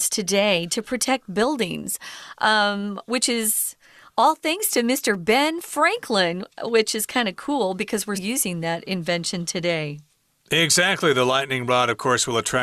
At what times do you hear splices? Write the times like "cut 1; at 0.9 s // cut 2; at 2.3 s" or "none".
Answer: cut 1; at 8.1 s